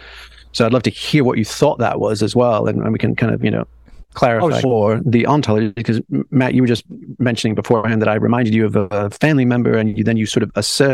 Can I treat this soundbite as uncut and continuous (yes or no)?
no